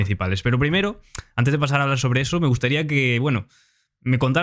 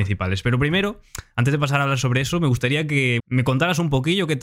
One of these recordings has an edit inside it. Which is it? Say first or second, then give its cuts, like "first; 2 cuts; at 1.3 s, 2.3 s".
second; 1 cut; at 3.2 s